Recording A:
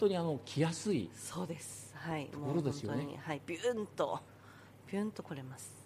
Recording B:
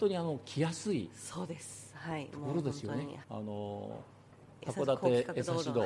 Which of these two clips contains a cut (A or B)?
B